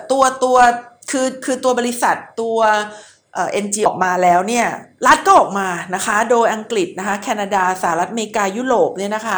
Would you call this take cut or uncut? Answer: cut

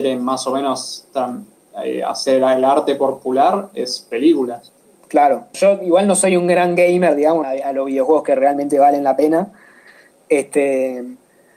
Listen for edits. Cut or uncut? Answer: cut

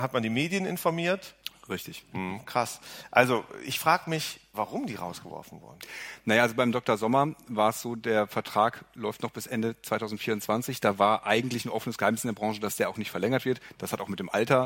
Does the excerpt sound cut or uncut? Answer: cut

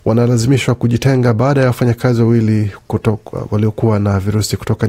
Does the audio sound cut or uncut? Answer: uncut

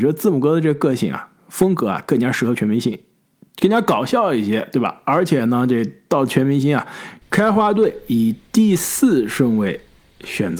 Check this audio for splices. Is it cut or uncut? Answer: cut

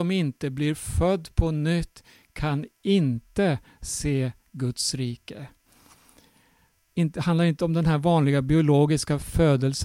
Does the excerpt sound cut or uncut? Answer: cut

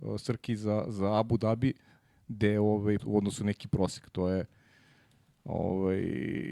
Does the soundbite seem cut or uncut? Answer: cut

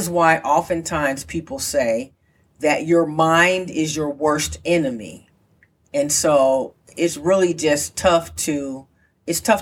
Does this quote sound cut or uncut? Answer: cut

